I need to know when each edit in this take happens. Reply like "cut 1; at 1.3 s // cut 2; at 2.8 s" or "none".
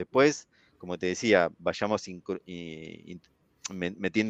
cut 1; at 1.5 s